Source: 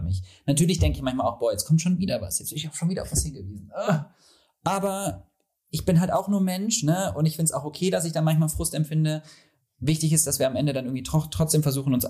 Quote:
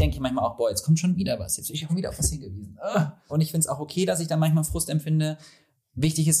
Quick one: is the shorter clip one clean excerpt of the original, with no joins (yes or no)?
no